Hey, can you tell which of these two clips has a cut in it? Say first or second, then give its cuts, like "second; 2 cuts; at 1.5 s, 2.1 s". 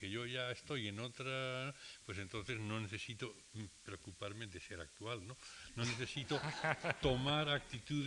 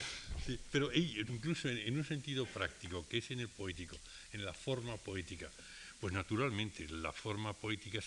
second; 1 cut; at 1.3 s